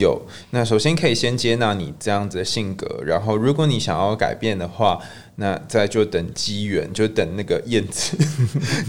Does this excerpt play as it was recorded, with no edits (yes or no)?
yes